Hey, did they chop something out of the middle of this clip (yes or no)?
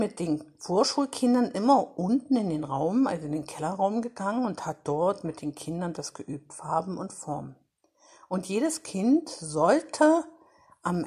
no